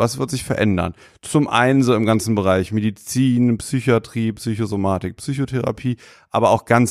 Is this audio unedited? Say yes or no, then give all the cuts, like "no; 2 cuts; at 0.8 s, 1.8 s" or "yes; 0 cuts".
yes; 0 cuts